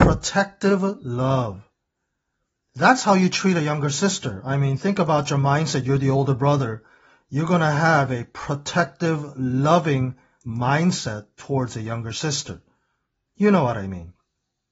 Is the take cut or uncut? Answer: uncut